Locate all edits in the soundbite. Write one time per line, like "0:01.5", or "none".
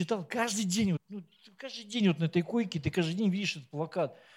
0:01.0